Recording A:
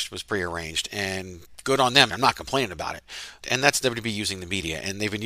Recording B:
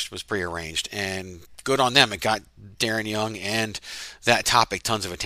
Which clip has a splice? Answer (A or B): A